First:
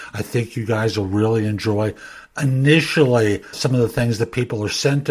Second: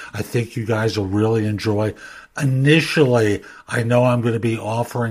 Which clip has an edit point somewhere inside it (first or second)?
first